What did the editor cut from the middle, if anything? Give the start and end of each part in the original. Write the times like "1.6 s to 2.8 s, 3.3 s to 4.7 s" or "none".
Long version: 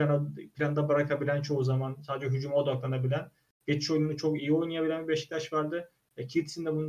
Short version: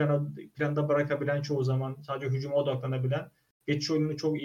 none